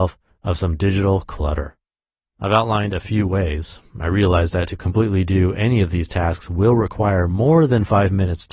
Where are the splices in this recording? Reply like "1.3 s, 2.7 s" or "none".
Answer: none